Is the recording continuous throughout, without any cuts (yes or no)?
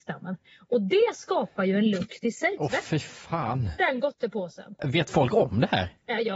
no